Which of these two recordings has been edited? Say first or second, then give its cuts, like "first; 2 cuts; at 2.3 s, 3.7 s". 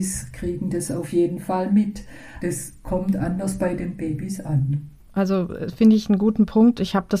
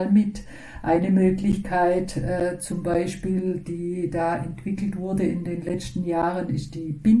first; 1 cut; at 2.4 s